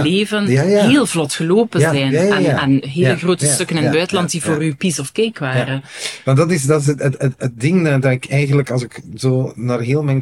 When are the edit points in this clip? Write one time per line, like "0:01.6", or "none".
none